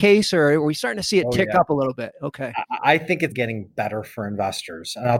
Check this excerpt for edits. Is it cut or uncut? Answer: cut